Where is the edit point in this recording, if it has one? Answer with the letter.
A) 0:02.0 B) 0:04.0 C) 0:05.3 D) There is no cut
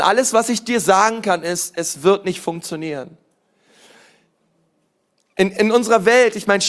D